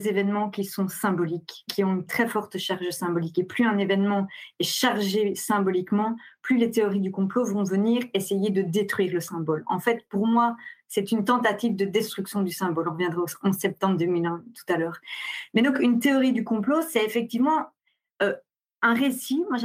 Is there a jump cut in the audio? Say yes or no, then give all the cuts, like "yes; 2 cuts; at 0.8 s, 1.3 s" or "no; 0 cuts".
no; 0 cuts